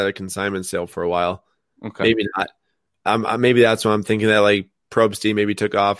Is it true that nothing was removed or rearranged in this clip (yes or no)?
yes